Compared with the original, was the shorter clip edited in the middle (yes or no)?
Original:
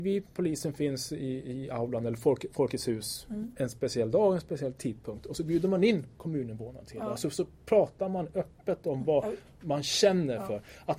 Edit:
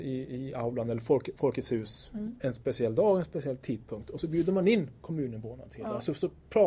no